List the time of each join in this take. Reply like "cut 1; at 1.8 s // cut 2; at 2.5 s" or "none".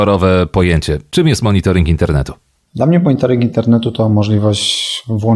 none